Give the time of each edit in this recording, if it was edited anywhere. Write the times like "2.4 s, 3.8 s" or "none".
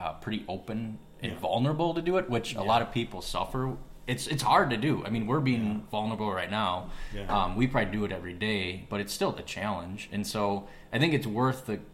none